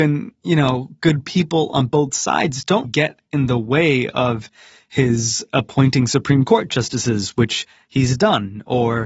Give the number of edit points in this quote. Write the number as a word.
one